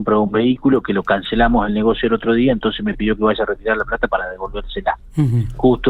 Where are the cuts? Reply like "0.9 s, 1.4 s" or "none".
none